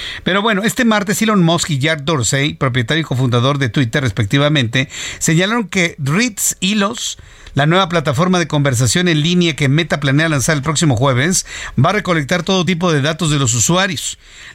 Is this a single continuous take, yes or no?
yes